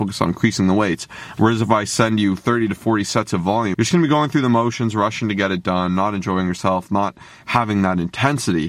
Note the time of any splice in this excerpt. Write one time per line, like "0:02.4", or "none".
0:03.7